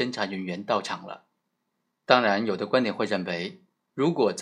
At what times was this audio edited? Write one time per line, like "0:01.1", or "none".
none